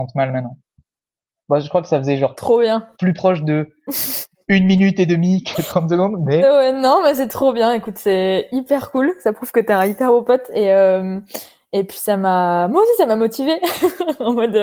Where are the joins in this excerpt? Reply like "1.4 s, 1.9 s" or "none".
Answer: none